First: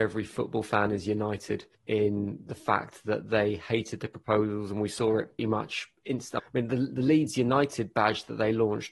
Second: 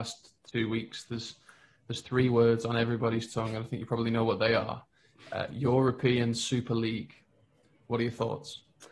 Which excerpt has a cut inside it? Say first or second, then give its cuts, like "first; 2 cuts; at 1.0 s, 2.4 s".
first; 3 cuts; at 1.7 s, 5.4 s, 6.4 s